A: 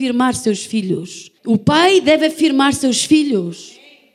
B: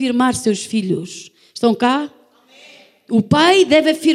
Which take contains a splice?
A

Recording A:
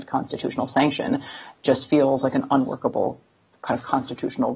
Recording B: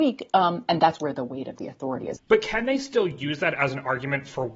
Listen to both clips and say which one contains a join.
B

